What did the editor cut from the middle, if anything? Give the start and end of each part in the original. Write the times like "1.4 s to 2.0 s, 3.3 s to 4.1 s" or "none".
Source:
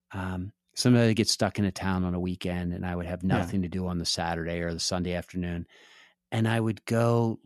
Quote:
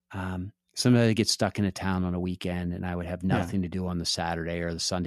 none